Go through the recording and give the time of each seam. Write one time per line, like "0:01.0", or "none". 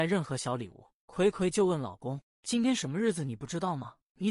none